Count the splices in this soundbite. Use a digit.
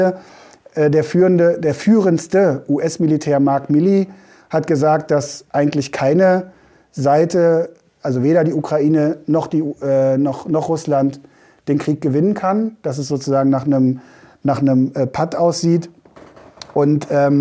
0